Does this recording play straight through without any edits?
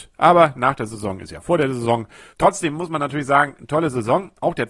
no; 1 cut; at 2.3 s

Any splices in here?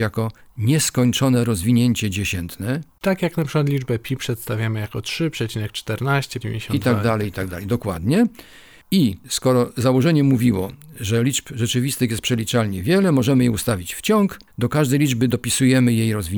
yes; 1 cut; at 6.4 s

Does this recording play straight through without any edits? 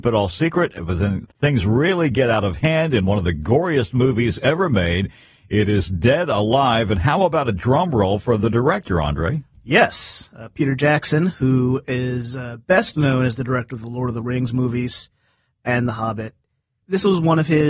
yes; 0 cuts

